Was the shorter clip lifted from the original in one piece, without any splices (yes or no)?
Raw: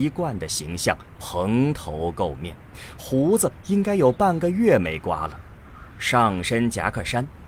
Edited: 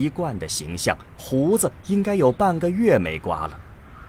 no